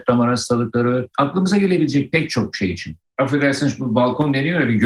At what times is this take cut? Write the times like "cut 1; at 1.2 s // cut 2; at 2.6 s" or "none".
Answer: cut 1; at 1.1 s // cut 2; at 3.1 s